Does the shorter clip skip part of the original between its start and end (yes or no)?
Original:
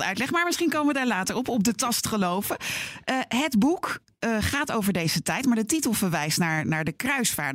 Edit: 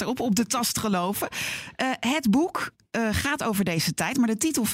no